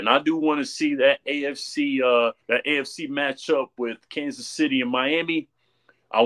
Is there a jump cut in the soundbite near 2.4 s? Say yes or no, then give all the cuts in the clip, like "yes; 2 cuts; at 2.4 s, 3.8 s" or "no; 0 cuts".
yes; 1 cut; at 2.4 s